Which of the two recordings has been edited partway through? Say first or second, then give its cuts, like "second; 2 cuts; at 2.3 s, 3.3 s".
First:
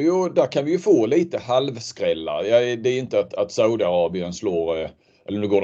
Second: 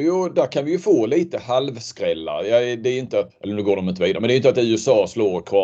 second; 1 cut; at 3.3 s